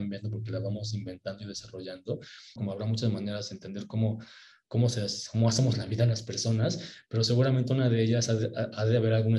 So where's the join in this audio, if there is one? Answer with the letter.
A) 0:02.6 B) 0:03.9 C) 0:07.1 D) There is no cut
A